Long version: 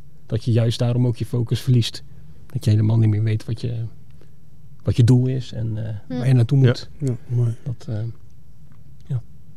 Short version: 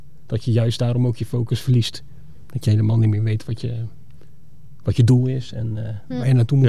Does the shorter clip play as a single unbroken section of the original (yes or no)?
yes